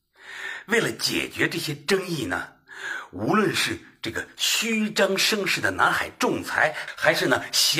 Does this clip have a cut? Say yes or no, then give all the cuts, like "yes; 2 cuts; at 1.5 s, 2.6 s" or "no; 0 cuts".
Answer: no; 0 cuts